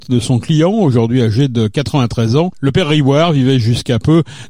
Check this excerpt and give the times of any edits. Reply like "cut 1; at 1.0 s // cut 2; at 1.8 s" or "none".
none